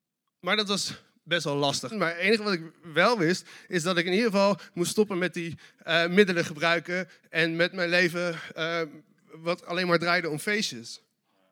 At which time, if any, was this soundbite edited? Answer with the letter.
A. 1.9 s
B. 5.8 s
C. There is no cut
A